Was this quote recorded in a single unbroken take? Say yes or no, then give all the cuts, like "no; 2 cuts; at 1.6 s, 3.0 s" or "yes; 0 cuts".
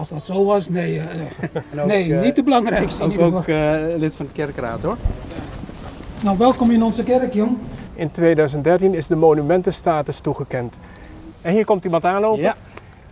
no; 2 cuts; at 7.9 s, 11.3 s